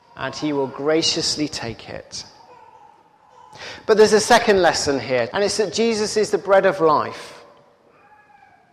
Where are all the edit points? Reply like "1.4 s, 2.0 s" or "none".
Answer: 5.3 s